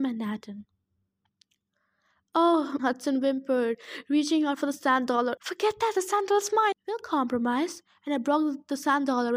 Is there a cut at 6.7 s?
yes; 3 cuts; at 2.8 s, 5.4 s, 6.7 s

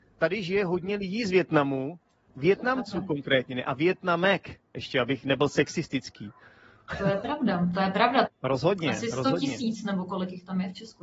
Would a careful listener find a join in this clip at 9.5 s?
no; 1 cut; at 8.2 s

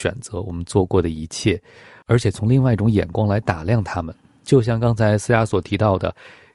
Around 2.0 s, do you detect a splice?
no; 0 cuts

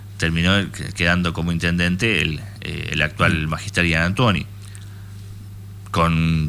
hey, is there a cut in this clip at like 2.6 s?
no; 0 cuts

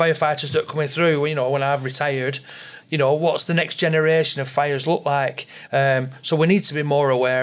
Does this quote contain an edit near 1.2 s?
no; 2 cuts; at 2.8 s, 5.7 s

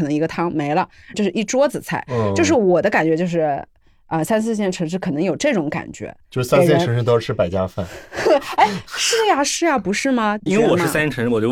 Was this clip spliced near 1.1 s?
yes; 2 cuts; at 1.1 s, 10.5 s

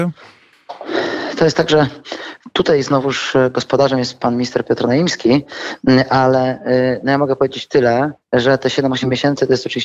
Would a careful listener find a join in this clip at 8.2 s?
yes; 1 cut; at 8.2 s

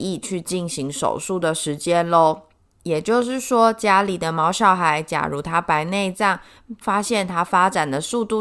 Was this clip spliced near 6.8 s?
yes; 1 cut; at 6.8 s

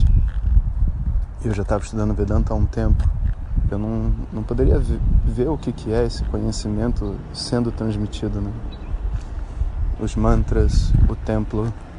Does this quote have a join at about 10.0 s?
yes; 2 cuts; at 3.7 s, 10.0 s

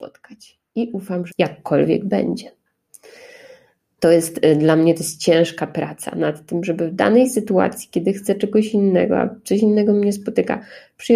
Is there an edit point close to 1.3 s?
yes; 2 cuts; at 1.3 s, 4.0 s

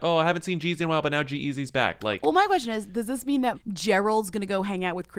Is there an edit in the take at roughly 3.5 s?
yes; 1 cut; at 3.5 s

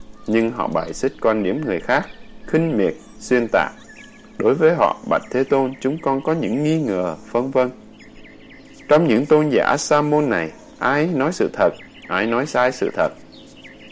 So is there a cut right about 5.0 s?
no; 1 cut; at 3.1 s

